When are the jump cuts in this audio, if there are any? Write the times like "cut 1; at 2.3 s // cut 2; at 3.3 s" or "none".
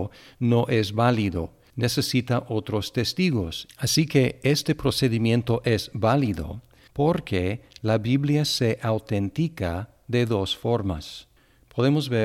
cut 1; at 3.7 s // cut 2; at 6.9 s